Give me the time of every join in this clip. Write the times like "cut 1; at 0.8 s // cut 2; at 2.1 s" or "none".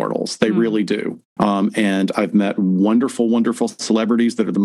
cut 1; at 1.4 s